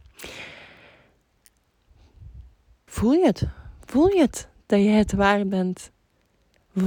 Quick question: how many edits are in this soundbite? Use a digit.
1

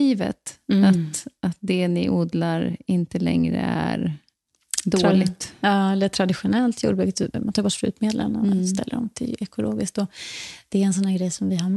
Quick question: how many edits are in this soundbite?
1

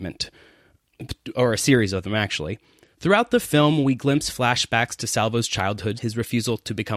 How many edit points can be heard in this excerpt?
2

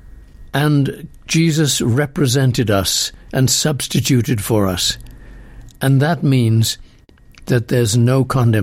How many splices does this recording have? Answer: 1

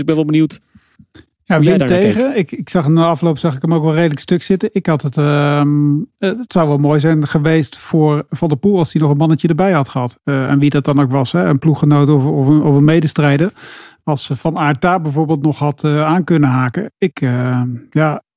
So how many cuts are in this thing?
0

